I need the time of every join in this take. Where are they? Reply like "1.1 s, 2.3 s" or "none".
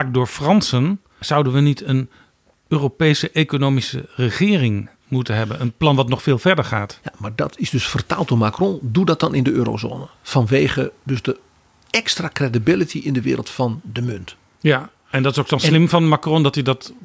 1.2 s